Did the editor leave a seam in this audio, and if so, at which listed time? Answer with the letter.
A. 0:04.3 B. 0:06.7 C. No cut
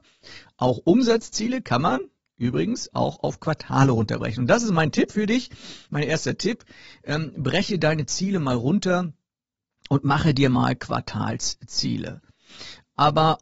C